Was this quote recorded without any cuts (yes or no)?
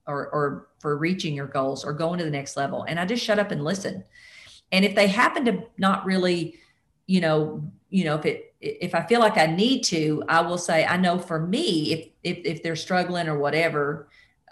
no